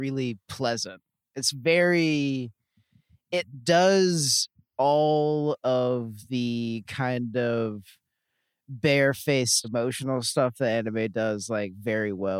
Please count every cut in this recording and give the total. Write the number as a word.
one